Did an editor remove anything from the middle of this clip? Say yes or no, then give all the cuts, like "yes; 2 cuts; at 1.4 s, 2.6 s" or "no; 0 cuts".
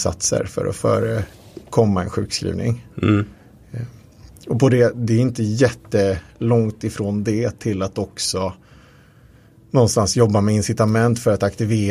no; 0 cuts